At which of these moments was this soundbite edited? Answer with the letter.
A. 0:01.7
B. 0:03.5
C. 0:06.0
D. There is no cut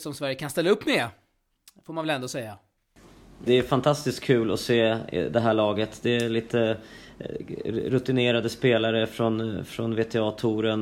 B